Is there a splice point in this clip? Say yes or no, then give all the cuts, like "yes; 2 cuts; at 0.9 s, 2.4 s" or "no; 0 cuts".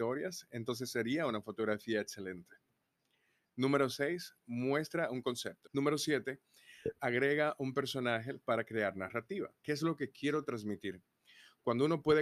yes; 2 cuts; at 5.6 s, 9.6 s